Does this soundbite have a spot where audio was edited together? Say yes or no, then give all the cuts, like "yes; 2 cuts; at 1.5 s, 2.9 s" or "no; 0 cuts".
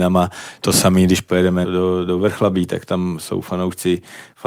yes; 1 cut; at 1.6 s